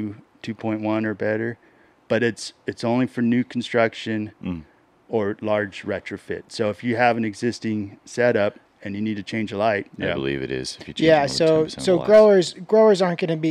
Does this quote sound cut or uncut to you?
cut